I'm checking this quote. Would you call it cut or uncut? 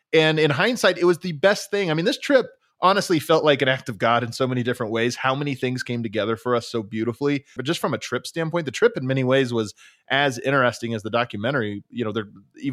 cut